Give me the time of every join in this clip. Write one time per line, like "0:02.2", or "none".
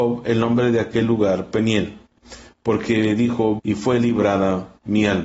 0:03.6